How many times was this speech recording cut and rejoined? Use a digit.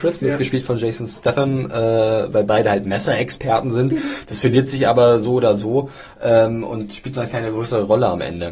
1